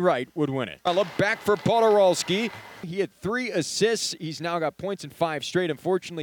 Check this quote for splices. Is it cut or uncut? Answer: cut